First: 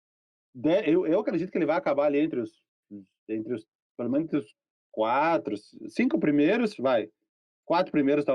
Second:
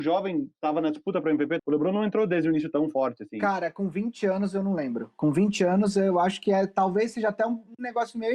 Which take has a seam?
second; 1 cut; at 1.6 s

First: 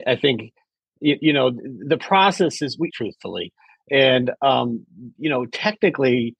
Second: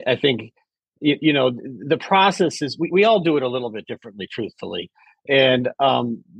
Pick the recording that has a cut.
first; 1 cut; at 2.9 s

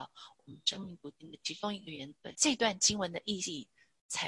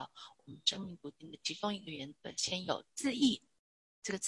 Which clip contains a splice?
first; 1 cut; at 2.3 s

